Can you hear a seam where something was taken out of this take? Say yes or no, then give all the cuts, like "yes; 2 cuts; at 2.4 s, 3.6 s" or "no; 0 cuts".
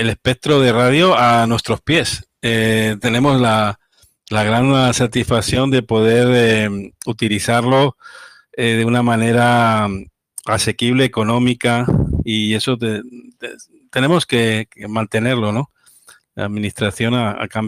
no; 0 cuts